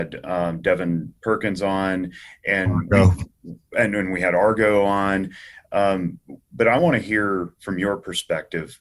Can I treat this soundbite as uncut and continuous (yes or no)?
yes